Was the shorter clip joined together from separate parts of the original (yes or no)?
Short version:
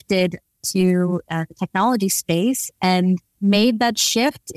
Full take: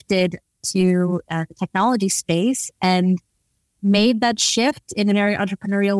yes